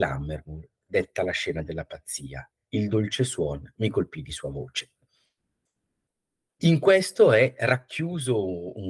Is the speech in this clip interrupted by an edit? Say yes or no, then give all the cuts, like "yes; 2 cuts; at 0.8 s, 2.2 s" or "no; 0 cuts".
no; 0 cuts